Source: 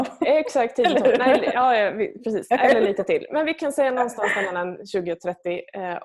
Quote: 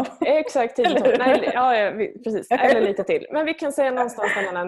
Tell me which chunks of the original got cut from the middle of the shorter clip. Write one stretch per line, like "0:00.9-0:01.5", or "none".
none